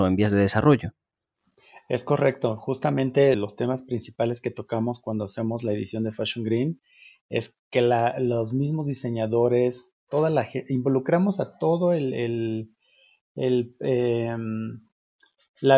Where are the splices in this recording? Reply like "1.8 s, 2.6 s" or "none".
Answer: 3.3 s, 7.6 s